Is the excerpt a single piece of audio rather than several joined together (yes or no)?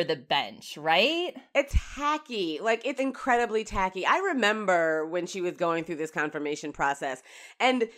no